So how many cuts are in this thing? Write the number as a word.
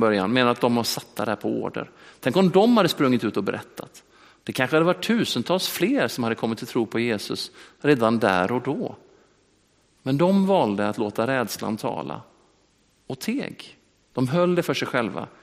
zero